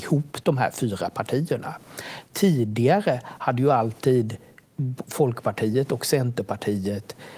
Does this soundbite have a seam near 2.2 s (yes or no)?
no